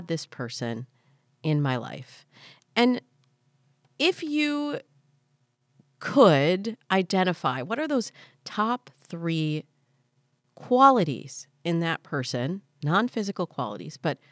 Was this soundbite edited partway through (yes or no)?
no